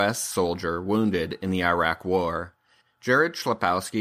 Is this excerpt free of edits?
yes; 0 cuts

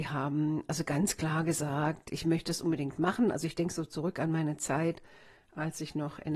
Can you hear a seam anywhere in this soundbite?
no; 0 cuts

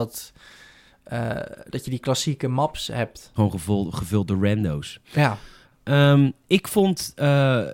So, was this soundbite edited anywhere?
yes; 2 cuts; at 3.4 s, 5.0 s

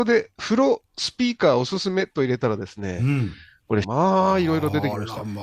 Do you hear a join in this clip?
yes; 1 cut; at 3.8 s

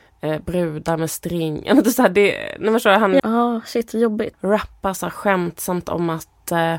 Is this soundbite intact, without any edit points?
no; 2 cuts; at 3.2 s, 4.3 s

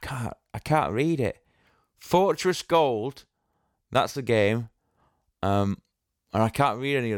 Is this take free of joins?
yes; 0 cuts

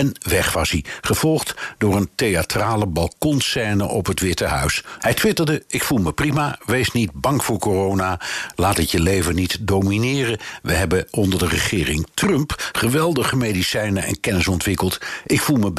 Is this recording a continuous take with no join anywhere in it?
no; 1 cut; at 5.0 s

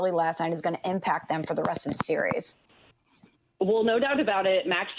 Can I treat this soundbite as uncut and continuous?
yes; 0 cuts

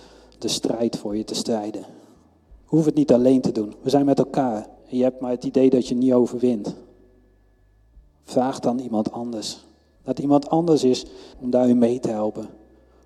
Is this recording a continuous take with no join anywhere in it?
no; 3 cuts; at 4.8 s, 9.9 s, 11.3 s

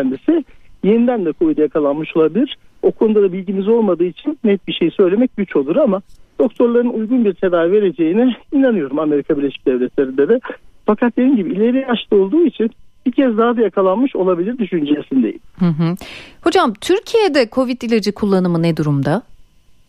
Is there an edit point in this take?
no; 0 cuts

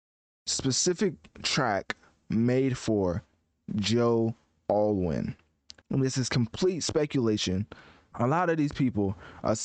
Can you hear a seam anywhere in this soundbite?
yes; 2 cuts; at 5.8 s, 8.1 s

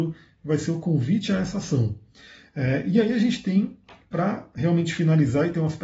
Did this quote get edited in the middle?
no; 0 cuts

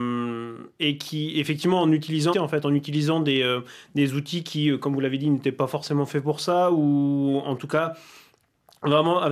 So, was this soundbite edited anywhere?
yes; 1 cut; at 2.3 s

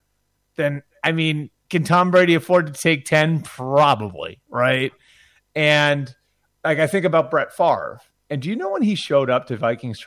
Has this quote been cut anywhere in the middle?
no; 0 cuts

